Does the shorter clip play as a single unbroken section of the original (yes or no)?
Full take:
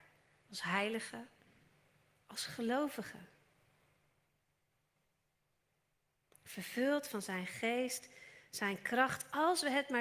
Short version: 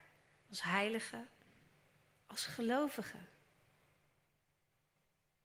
yes